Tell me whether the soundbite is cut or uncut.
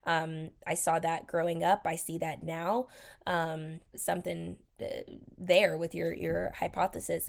cut